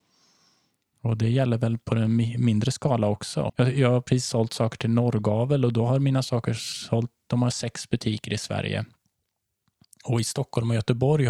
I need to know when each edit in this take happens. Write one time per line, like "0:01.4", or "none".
0:03.5